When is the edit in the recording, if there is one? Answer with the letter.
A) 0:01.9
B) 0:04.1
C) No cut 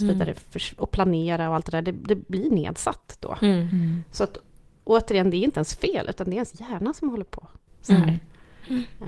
C